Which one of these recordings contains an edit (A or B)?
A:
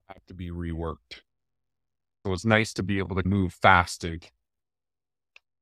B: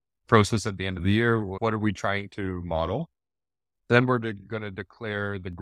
A